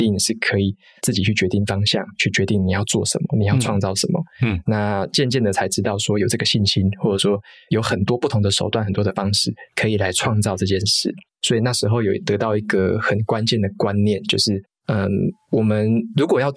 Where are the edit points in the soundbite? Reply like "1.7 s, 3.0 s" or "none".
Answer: none